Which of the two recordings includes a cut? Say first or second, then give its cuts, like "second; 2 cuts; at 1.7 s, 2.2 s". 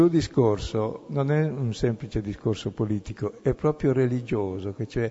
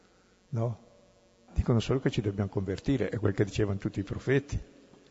second; 1 cut; at 1.5 s